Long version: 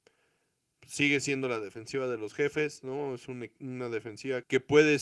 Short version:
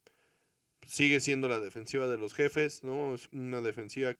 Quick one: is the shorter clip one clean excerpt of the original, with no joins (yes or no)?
no